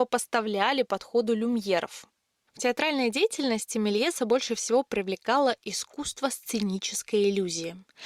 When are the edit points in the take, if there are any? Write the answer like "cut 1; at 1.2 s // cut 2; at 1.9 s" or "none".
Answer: cut 1; at 2.4 s